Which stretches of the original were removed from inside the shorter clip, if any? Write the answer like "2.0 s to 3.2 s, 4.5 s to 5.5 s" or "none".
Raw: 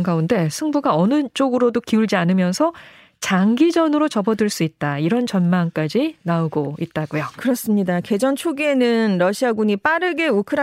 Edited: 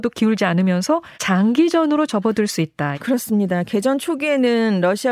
2.9 s to 3.2 s, 5.0 s to 7.3 s

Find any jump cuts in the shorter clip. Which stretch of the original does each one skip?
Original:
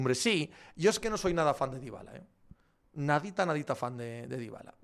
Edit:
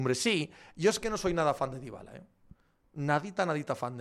none

